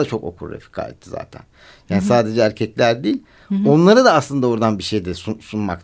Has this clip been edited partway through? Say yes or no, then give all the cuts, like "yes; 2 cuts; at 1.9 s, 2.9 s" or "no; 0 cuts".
no; 0 cuts